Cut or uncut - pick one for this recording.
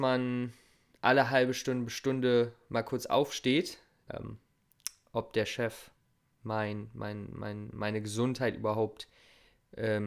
cut